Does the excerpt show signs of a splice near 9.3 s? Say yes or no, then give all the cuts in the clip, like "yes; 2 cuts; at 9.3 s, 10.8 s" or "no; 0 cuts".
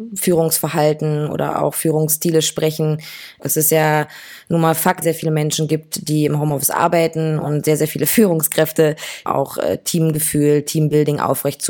yes; 3 cuts; at 3.4 s, 5.0 s, 9.3 s